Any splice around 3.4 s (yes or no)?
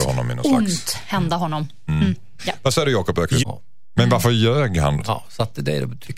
yes